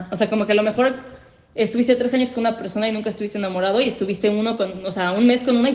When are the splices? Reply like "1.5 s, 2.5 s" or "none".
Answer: none